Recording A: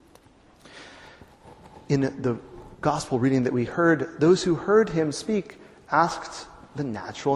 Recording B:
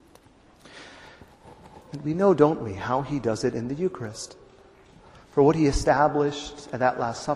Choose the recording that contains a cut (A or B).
B